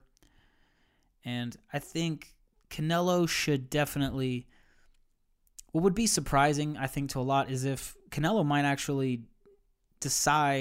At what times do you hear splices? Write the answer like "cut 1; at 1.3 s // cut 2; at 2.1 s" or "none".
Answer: none